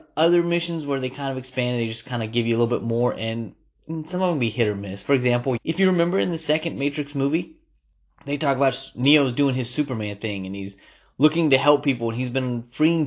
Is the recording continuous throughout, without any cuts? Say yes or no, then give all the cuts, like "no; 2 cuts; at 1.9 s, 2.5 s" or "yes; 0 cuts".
no; 1 cut; at 5.6 s